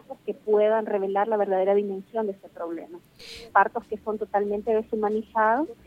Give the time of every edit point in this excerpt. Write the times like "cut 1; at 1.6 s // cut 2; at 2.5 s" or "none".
cut 1; at 3.5 s